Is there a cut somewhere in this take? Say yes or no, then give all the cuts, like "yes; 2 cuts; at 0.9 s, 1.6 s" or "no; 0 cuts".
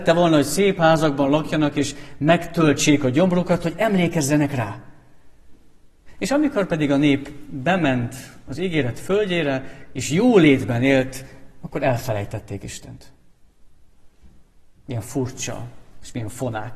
no; 0 cuts